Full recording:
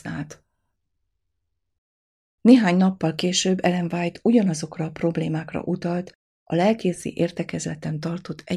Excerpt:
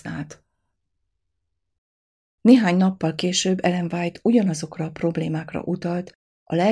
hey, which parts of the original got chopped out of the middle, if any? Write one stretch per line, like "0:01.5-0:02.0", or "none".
none

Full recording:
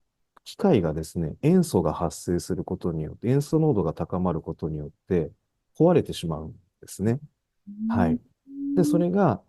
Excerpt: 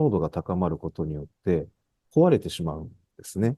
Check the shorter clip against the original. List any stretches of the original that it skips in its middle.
none

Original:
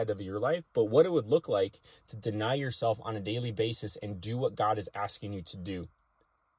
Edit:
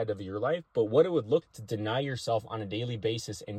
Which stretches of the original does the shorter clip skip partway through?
0:01.4-0:02.0

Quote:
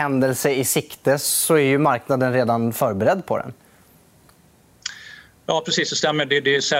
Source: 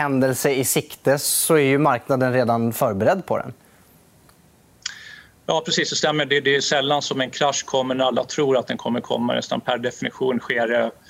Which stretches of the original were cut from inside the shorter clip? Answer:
none

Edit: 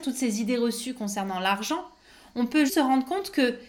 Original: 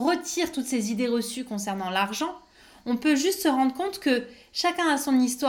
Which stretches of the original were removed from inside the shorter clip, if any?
0:03.2-0:03.4

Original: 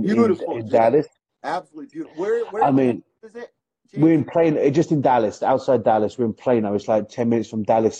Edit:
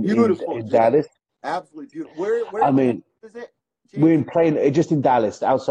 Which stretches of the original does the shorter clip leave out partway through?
none

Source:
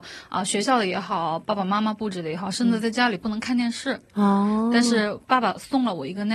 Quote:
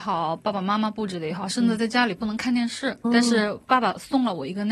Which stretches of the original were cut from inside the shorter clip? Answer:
0:04.1-0:04.6

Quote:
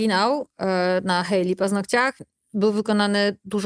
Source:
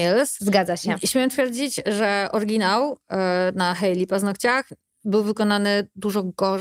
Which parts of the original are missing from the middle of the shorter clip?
none

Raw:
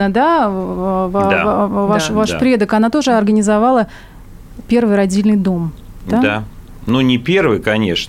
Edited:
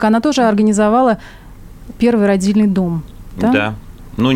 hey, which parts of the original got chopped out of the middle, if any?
none

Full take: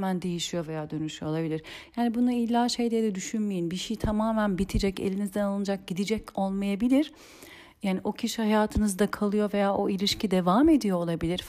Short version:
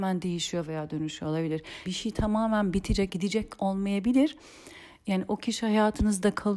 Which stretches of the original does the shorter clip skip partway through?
0:01.9-0:03.7
0:04.9-0:05.9

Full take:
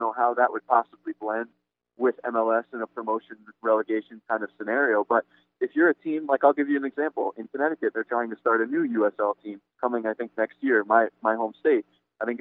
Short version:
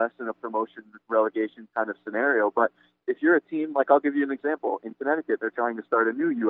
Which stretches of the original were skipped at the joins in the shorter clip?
none

